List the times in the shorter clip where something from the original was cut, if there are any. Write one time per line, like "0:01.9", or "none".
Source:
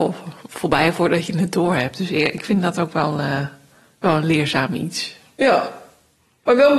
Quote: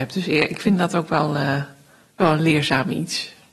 none